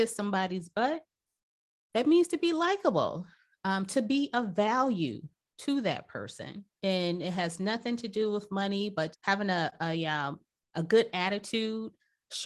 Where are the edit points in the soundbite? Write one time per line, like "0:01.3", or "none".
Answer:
0:09.1